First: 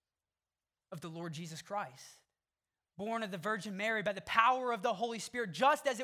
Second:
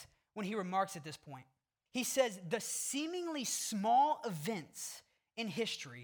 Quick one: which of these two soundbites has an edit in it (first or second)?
second